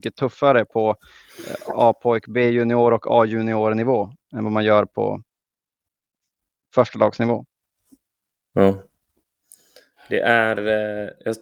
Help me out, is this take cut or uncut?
uncut